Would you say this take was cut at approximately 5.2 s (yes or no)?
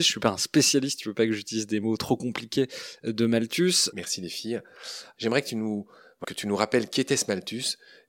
yes